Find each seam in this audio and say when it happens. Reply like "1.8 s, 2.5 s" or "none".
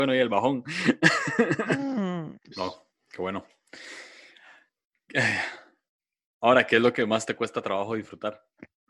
2.5 s